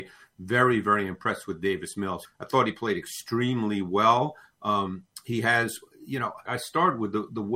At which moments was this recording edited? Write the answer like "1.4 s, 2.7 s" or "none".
2.2 s, 6.5 s